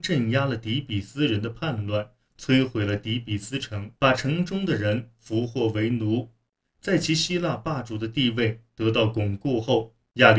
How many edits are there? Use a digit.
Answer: 1